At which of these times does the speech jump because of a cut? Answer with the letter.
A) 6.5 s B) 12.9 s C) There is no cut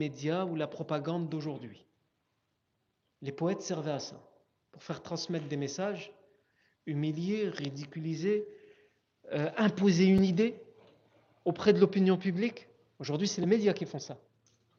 C